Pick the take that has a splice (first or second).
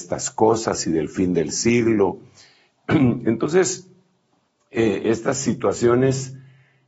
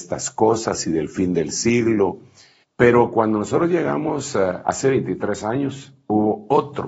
second